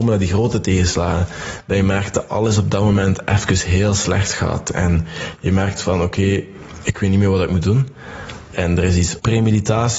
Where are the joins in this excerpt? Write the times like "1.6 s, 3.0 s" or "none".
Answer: 8.5 s